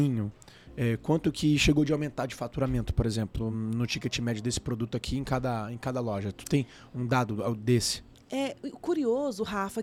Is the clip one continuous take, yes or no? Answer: yes